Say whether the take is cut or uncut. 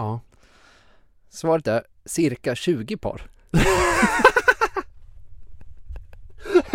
uncut